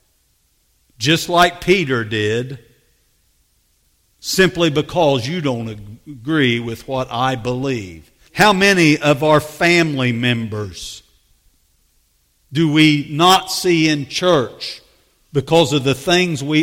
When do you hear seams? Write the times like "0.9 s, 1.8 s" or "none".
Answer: 8.3 s